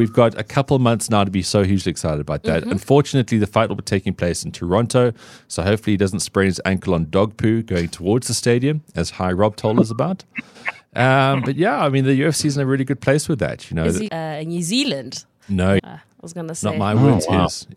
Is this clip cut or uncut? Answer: cut